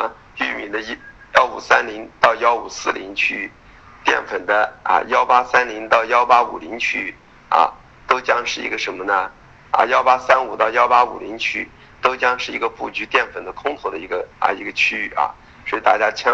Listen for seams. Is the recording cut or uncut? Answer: cut